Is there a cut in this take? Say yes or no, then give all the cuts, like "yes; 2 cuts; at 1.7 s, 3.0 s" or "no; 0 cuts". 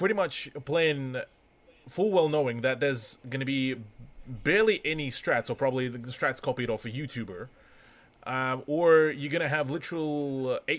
no; 0 cuts